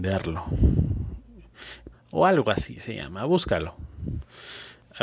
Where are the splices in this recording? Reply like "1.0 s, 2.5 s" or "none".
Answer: 1.9 s